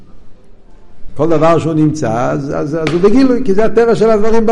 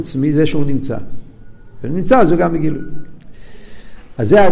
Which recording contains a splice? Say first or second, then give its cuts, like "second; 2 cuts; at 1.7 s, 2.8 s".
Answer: first; 1 cut; at 1.1 s